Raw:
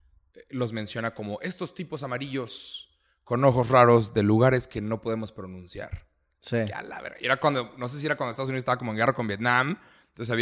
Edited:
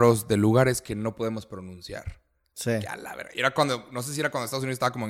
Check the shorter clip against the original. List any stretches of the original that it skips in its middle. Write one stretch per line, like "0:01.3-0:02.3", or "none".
none